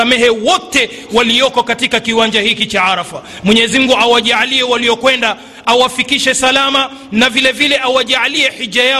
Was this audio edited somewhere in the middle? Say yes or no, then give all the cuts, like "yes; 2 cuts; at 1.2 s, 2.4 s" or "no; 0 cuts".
no; 0 cuts